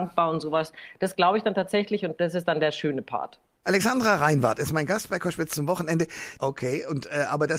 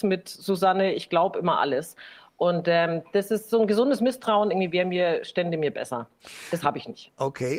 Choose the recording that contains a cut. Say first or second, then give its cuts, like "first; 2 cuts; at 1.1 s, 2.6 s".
first; 2 cuts; at 3.6 s, 6.4 s